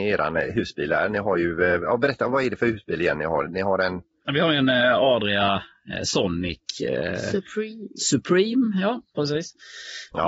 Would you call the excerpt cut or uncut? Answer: uncut